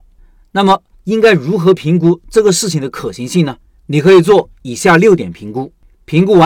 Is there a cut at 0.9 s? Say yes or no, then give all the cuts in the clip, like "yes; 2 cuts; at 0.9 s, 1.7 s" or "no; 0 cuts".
yes; 1 cut; at 0.9 s